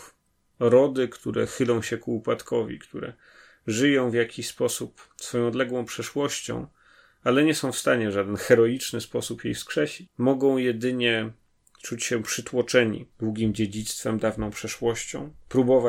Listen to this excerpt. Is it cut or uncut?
uncut